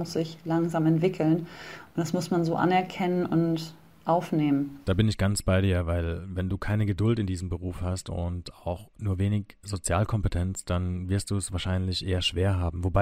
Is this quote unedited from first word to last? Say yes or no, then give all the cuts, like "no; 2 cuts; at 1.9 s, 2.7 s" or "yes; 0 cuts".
yes; 0 cuts